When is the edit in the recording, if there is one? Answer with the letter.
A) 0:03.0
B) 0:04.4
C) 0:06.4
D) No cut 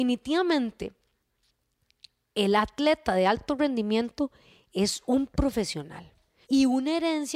C